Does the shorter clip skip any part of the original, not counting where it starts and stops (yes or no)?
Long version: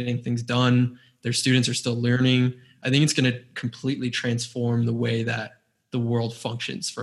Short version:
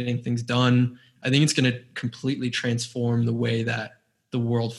yes